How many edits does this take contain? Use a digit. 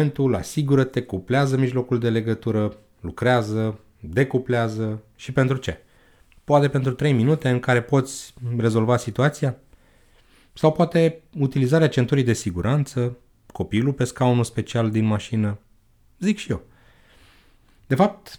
0